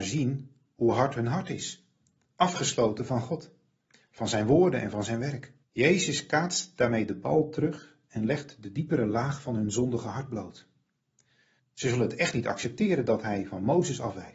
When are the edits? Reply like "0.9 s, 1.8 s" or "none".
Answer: 5.6 s, 11.6 s

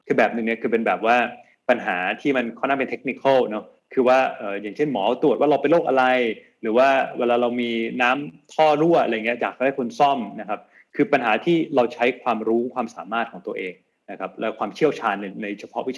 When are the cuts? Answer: none

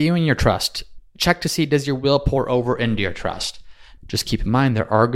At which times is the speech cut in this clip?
4.0 s

